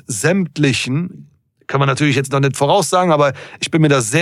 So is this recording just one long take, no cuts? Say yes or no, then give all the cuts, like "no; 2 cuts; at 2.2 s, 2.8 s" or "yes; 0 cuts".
yes; 0 cuts